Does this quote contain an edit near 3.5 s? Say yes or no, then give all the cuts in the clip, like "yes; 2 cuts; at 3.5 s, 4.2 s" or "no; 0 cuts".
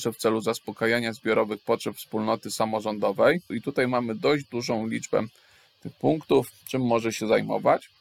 yes; 1 cut; at 3.5 s